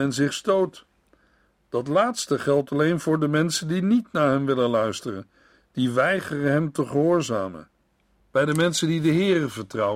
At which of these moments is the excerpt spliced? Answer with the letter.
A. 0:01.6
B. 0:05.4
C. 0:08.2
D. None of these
C